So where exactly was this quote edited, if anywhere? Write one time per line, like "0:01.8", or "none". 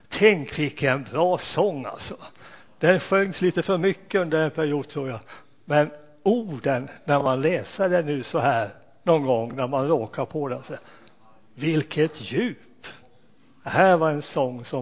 none